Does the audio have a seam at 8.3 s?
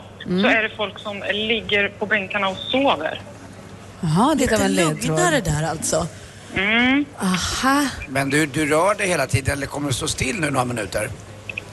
no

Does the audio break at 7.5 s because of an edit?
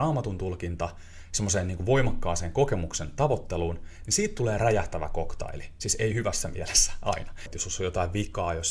yes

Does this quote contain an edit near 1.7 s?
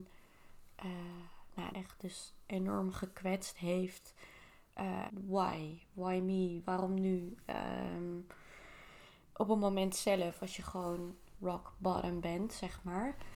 yes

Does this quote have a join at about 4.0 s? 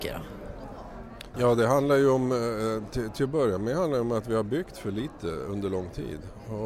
no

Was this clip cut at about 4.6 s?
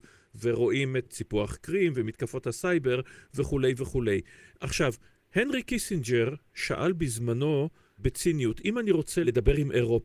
no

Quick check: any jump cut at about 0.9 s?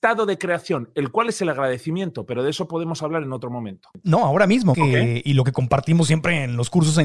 no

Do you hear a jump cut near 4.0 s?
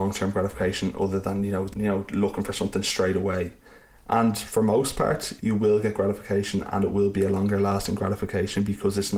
no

